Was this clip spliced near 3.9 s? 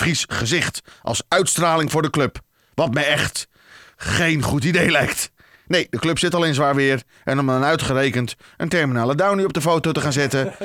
no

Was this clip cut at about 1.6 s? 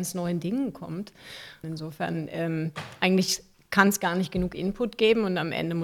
yes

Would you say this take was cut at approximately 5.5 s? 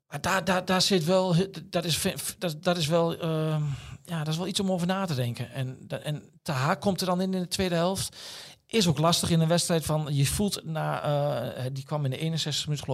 no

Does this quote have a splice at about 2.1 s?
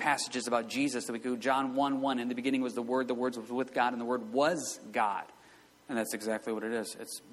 no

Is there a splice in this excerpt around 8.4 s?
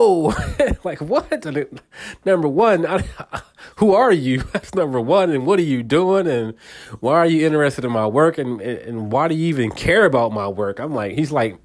no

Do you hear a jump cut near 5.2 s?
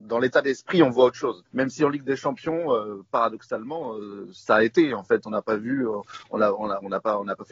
no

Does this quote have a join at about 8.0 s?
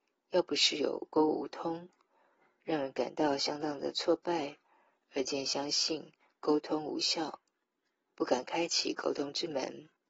yes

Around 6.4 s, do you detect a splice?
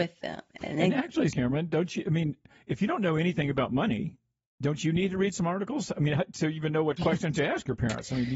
no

